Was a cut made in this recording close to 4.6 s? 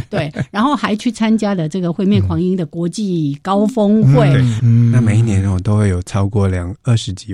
yes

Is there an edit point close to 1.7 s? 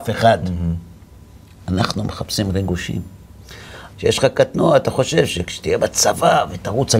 no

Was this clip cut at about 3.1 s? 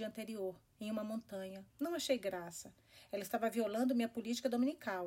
no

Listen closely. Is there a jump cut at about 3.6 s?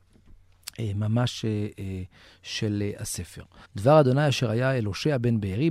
yes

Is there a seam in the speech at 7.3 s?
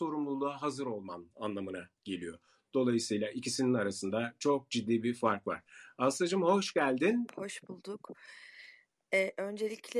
yes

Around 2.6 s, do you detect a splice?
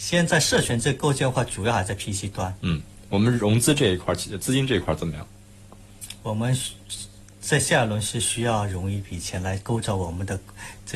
yes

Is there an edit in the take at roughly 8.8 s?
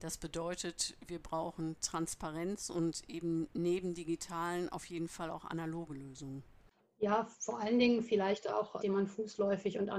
yes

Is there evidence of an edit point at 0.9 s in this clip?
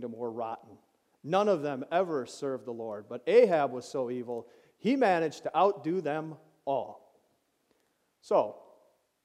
no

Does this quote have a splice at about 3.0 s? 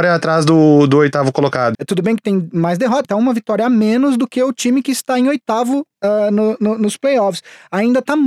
yes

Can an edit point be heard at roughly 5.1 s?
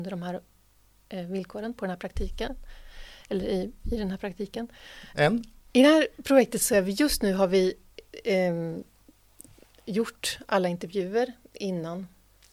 yes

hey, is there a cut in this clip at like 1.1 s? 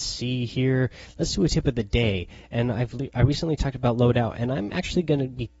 no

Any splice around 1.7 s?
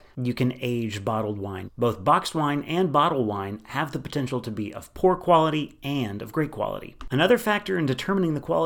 yes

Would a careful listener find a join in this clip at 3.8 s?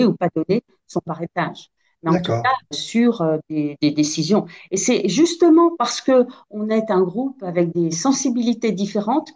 yes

